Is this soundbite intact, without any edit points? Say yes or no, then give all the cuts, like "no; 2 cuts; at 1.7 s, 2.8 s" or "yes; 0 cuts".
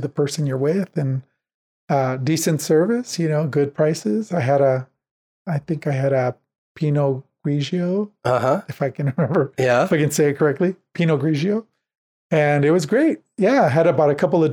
yes; 0 cuts